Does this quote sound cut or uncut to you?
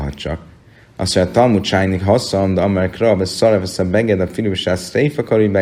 uncut